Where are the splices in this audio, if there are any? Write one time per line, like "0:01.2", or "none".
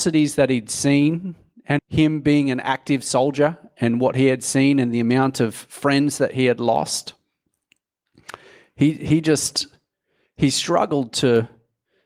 0:01.8